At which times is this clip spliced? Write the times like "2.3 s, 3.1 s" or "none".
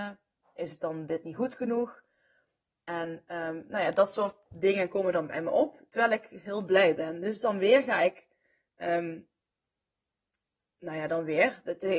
4.4 s